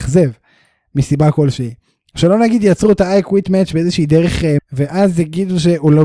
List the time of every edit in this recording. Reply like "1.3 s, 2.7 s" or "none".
4.6 s

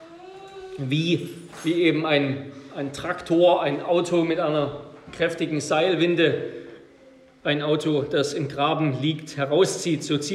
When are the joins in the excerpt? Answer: none

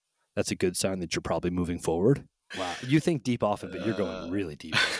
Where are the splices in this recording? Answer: 2.5 s

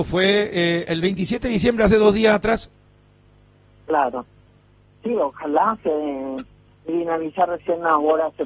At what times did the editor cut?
none

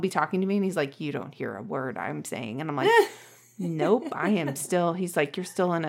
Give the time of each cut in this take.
none

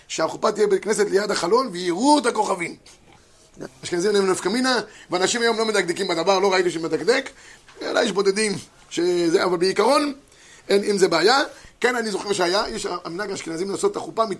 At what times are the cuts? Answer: 3.7 s, 4.9 s

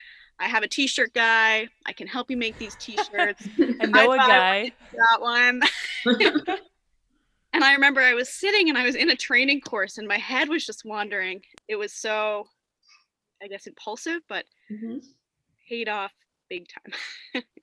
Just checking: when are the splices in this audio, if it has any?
11.6 s

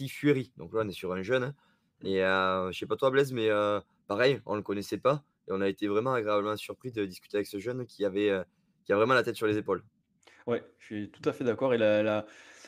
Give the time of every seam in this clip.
none

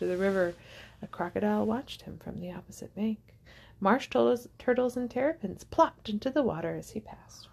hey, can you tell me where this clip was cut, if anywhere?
none

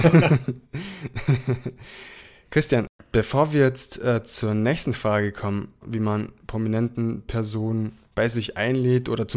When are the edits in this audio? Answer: 5.8 s

